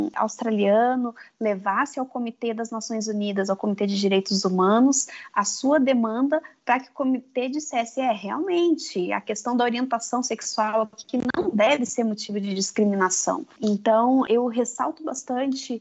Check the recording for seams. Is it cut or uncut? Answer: uncut